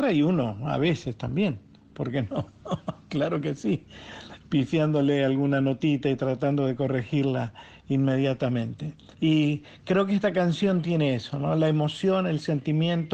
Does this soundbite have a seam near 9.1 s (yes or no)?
yes